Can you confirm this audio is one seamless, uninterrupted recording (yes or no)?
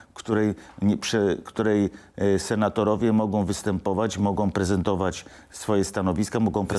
yes